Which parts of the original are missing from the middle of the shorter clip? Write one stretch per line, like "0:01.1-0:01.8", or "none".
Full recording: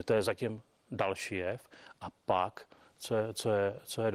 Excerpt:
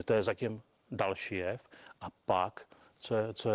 none